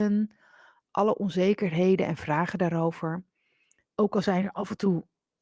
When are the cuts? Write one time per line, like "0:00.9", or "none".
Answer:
0:03.9